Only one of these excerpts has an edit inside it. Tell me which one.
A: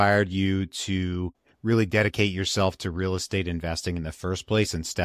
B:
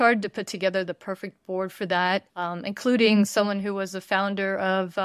B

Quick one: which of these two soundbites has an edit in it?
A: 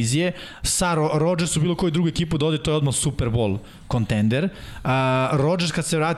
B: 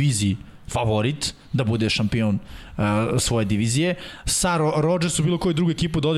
B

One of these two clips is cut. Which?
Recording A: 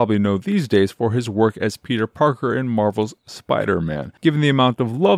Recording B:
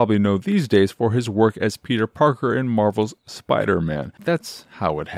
B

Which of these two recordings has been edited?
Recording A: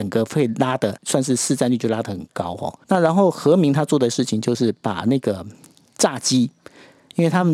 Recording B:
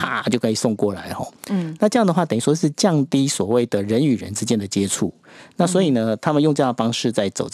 A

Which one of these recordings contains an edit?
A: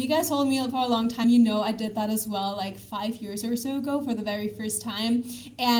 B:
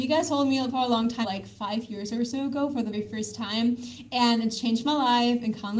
B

